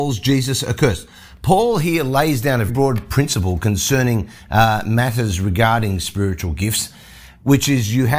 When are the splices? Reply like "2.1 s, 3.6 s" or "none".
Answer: 2.7 s